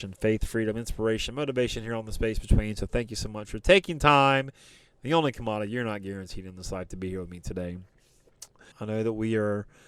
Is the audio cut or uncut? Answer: cut